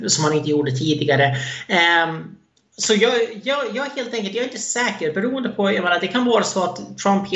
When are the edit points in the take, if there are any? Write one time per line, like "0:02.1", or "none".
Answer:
none